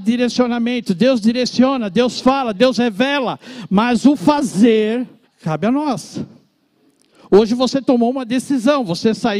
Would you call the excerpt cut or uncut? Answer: cut